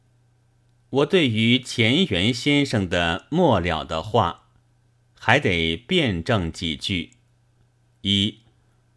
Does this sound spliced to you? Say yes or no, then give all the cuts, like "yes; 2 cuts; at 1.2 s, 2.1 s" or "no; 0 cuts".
no; 0 cuts